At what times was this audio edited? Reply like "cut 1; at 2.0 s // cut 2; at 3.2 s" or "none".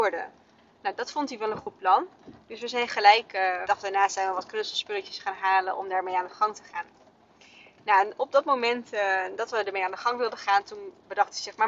cut 1; at 3.6 s